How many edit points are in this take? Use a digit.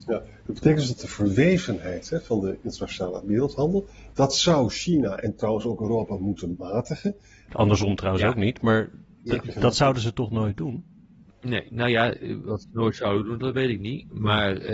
2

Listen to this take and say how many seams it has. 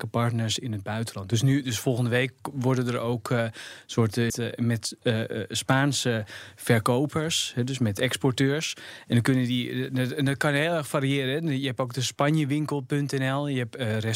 1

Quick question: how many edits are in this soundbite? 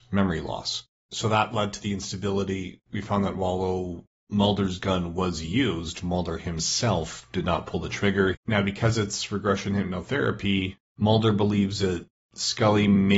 2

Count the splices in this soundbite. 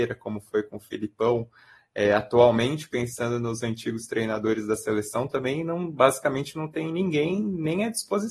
0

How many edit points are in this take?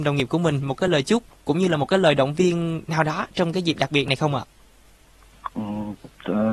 0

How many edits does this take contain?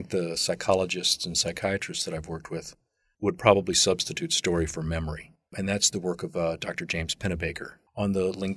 1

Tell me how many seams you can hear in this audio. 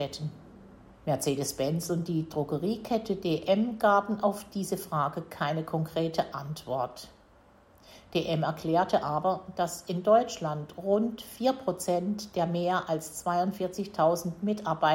1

